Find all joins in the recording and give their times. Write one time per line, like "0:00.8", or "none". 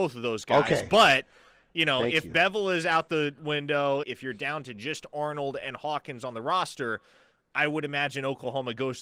0:04.0